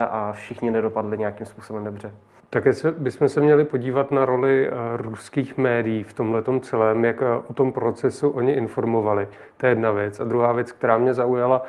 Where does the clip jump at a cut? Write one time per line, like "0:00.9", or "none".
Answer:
none